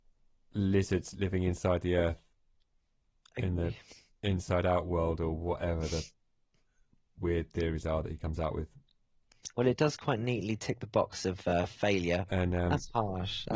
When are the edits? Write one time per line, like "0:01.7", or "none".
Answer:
0:12.3